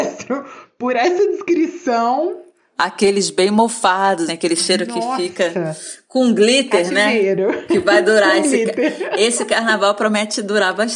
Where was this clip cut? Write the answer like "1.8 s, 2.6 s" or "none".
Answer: 4.3 s